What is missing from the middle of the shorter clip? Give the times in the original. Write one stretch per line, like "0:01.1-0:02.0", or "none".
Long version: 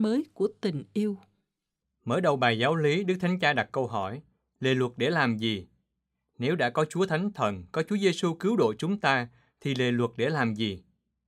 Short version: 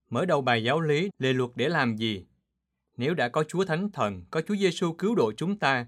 0:03.0-0:04.5